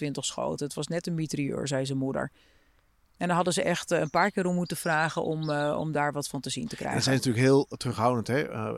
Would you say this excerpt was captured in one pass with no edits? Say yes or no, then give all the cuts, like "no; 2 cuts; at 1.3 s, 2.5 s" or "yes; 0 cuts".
yes; 0 cuts